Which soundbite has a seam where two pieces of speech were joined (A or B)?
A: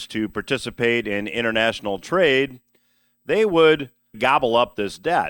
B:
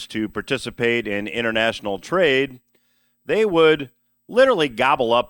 A